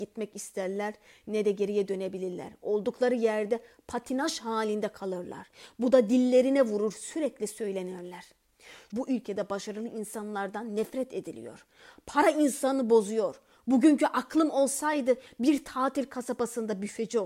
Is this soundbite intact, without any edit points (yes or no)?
no